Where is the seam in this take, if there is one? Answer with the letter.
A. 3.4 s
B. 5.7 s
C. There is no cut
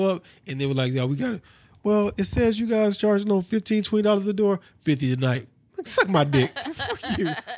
B